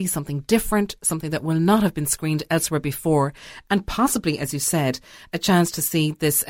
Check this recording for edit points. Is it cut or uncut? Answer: uncut